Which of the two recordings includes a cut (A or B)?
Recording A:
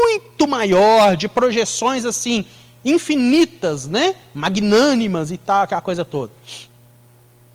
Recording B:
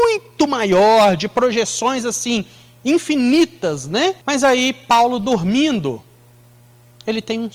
B